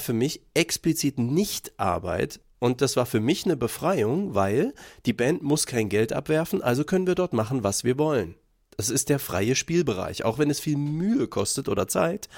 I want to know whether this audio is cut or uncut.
uncut